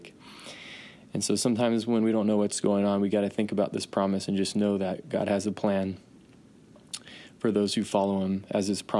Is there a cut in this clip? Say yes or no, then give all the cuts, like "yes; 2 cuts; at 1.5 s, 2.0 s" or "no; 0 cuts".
no; 0 cuts